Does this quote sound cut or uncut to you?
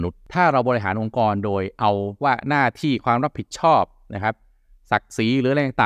uncut